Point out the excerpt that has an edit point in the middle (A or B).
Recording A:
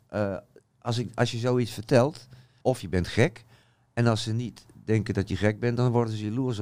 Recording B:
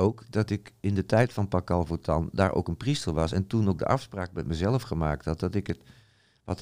A